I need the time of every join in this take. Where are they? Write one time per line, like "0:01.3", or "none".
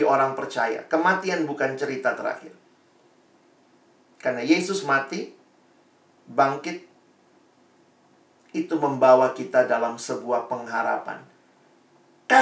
none